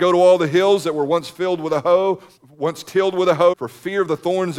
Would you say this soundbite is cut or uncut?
cut